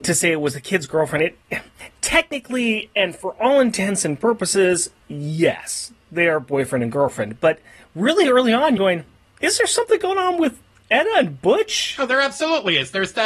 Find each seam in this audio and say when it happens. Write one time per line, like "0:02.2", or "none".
0:08.8